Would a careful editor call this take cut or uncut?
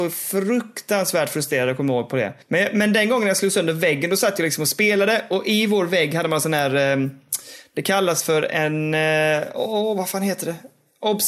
cut